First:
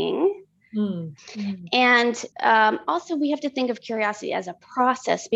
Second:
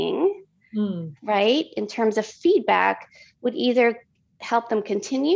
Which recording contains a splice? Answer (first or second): first